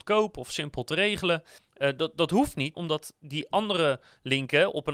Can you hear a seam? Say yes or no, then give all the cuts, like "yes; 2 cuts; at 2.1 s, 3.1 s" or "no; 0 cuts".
yes; 2 cuts; at 1.6 s, 2.7 s